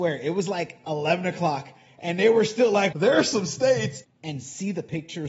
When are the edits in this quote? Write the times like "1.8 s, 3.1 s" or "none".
2.9 s, 4.0 s